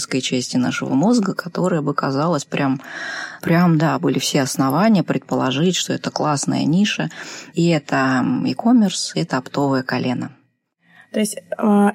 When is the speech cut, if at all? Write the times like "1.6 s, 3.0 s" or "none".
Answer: 3.4 s, 7.5 s, 9.1 s

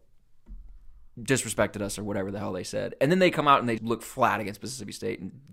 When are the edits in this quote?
3.8 s

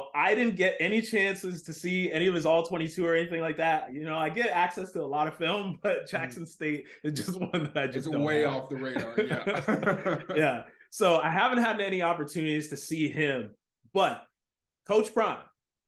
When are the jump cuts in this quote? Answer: none

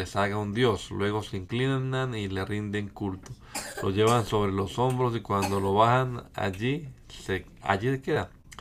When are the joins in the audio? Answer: none

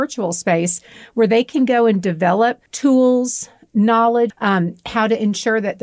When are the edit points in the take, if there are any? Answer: 2.7 s, 4.3 s

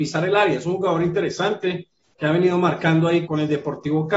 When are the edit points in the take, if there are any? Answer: 3.3 s

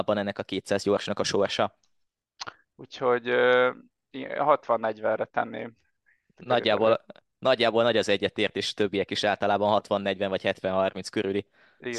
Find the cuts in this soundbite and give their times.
2.6 s

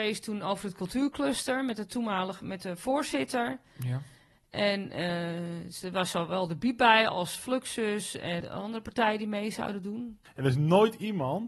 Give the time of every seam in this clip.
8.4 s, 10.3 s

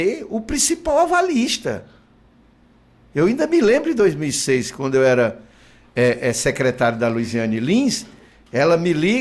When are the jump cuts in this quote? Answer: none

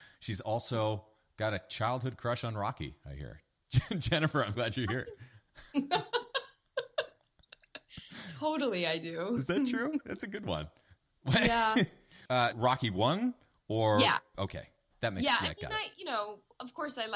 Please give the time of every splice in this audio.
4.5 s, 12.5 s

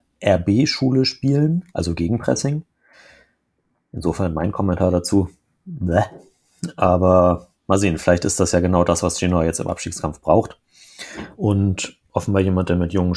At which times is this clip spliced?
1.7 s, 7.6 s, 11.3 s

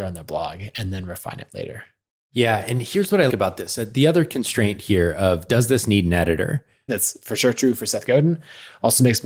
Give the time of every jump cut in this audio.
3.3 s, 6.9 s

